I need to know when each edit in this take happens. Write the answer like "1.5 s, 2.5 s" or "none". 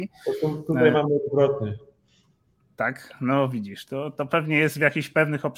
none